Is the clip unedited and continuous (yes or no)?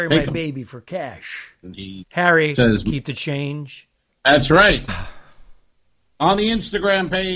no